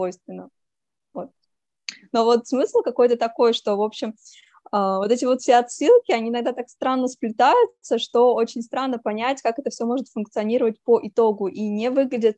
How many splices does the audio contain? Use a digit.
1